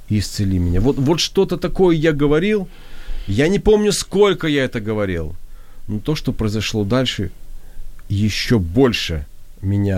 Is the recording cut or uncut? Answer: uncut